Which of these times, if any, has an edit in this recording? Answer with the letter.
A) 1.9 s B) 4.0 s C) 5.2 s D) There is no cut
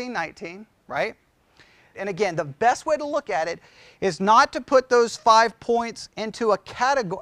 A